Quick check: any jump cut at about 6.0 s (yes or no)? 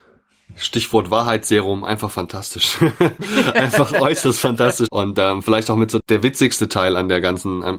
yes